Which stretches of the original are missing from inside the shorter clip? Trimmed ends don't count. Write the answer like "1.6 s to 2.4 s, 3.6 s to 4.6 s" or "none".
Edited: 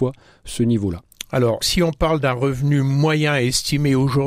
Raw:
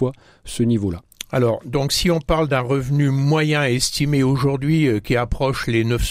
1.6 s to 1.9 s